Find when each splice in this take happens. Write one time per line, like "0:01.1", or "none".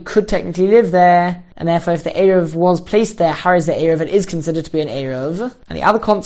none